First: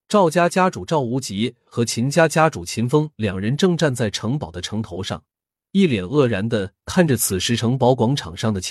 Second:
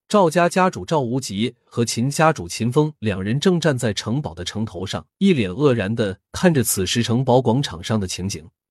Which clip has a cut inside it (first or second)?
second